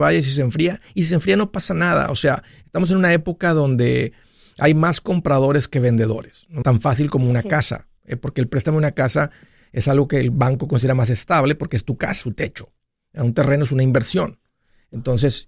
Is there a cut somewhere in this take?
yes; 2 cuts; at 6.6 s, 12.2 s

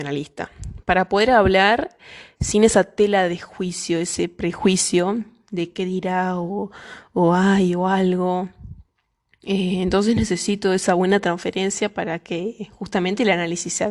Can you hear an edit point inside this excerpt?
no; 0 cuts

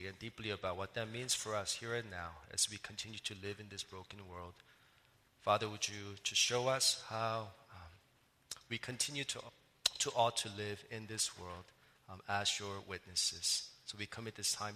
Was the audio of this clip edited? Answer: no; 0 cuts

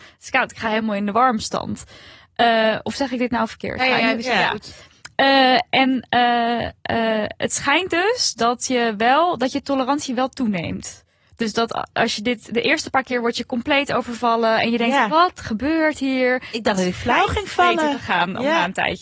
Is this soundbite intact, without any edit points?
yes; 0 cuts

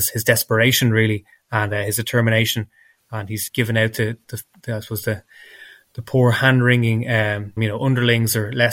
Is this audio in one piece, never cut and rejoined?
no; 2 cuts; at 3.5 s, 7.6 s

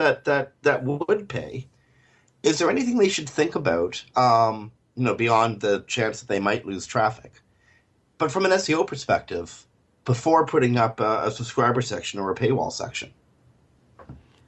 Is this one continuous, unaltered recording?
yes; 0 cuts

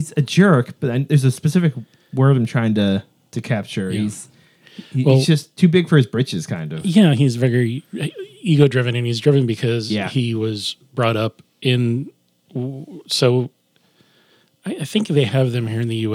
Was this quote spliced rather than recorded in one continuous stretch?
no; 0 cuts

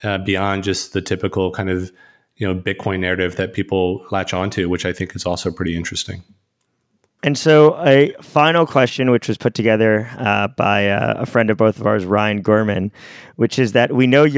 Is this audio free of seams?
yes; 0 cuts

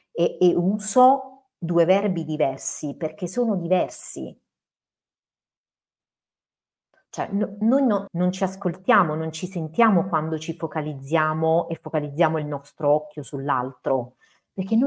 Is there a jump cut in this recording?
yes; 1 cut; at 8.1 s

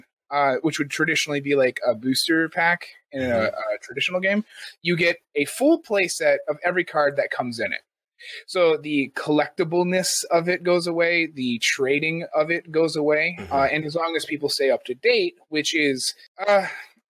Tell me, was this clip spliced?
no; 0 cuts

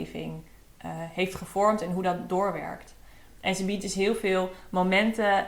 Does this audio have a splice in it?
no; 0 cuts

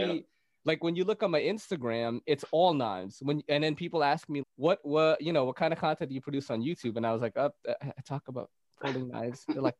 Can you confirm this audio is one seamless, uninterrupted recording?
no; 1 cut; at 4.4 s

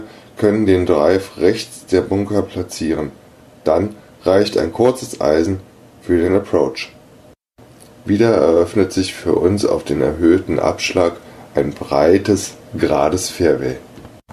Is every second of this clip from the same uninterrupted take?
no; 1 cut; at 12.6 s

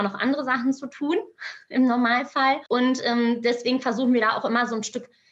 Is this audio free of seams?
no; 1 cut; at 2.7 s

